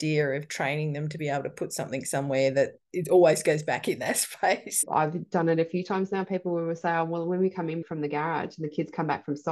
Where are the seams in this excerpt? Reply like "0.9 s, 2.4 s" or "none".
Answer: 4.8 s